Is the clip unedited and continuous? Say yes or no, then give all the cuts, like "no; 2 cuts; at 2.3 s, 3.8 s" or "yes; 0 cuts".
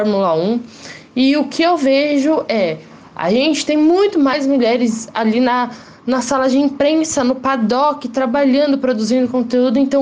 yes; 0 cuts